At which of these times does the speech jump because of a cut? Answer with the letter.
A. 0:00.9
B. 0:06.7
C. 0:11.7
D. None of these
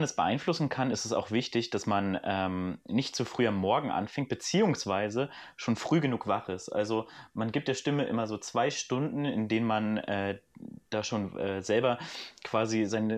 D